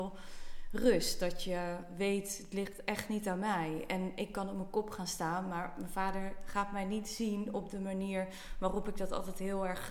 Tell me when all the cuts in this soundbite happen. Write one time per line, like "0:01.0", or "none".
none